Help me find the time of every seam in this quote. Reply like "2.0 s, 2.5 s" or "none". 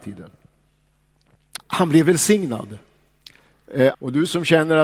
1.6 s, 3.9 s